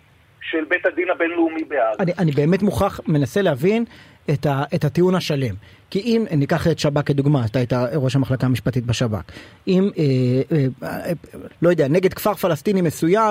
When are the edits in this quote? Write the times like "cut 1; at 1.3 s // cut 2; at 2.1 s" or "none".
cut 1; at 9.9 s // cut 2; at 11.5 s